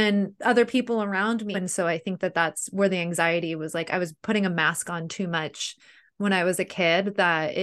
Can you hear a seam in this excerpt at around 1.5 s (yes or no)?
yes